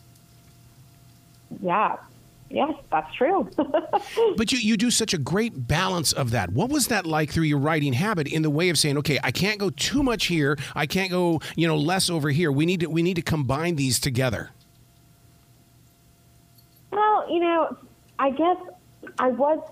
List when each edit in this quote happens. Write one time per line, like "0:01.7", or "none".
none